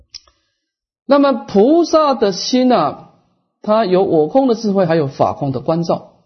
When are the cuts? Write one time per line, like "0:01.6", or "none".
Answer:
none

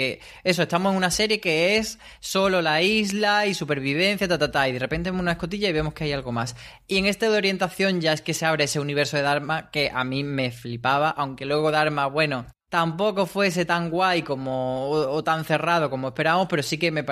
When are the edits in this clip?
0:12.6

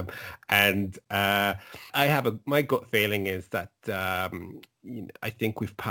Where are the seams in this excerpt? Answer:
0:01.9

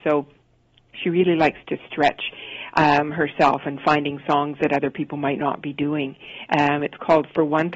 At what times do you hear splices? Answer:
0:06.5

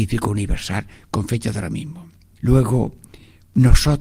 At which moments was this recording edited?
0:02.4

